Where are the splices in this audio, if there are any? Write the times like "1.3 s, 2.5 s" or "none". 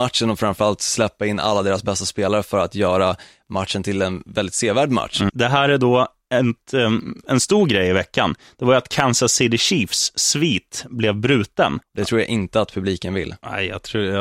5.3 s, 7.2 s, 11.8 s